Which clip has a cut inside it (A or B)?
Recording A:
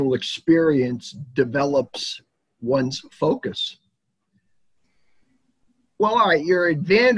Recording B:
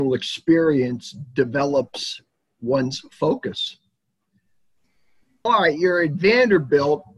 B